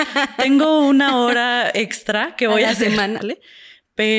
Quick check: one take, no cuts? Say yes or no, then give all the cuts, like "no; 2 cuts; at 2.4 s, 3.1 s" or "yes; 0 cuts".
no; 1 cut; at 3.2 s